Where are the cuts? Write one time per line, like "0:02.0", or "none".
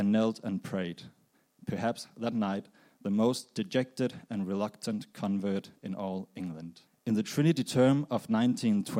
0:06.9